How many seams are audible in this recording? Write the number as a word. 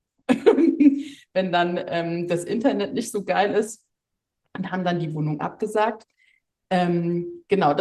zero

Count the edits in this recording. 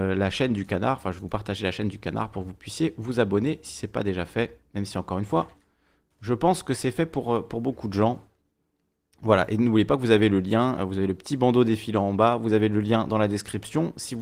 zero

